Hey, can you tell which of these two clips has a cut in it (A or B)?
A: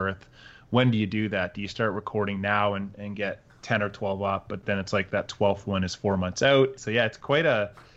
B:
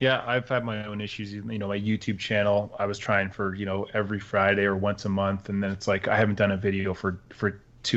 A